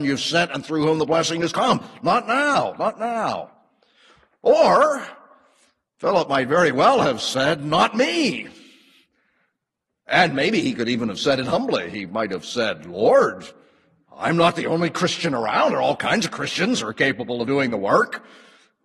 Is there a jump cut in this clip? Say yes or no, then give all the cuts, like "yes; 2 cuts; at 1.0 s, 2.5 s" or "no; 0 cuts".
no; 0 cuts